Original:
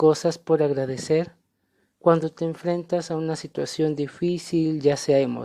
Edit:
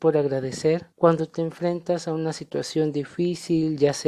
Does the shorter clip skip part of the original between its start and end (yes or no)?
yes